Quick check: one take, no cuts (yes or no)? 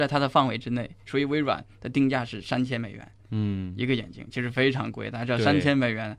no